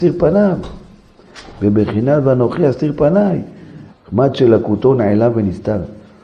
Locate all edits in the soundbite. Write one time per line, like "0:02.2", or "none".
0:02.7
0:03.9

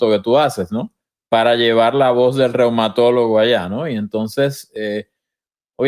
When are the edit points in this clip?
none

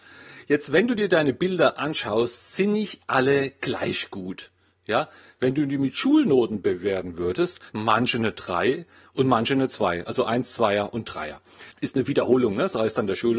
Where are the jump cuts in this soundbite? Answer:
0:07.7
0:11.7

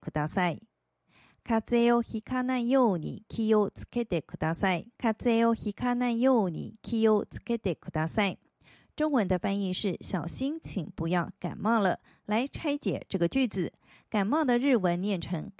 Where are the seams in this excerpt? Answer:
0:04.9

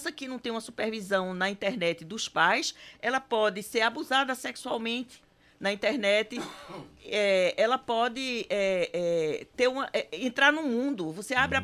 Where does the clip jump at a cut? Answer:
none

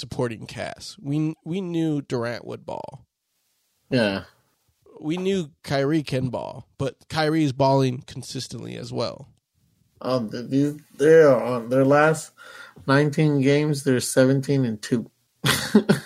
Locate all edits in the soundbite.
none

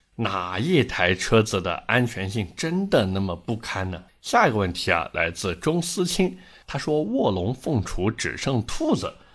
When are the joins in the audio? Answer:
0:04.1

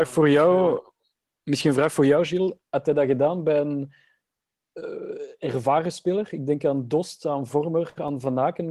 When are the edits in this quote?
none

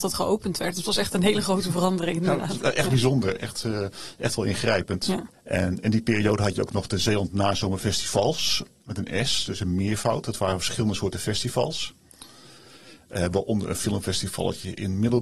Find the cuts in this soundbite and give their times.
none

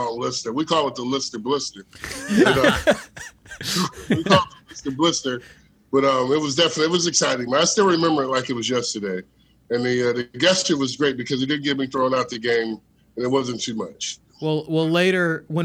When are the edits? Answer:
none

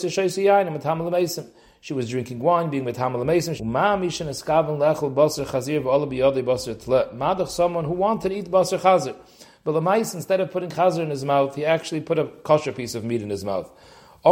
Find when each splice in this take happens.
0:03.6

